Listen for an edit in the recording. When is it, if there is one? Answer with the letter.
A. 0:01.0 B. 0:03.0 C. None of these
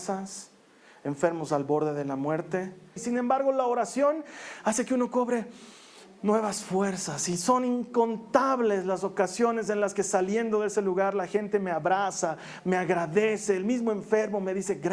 B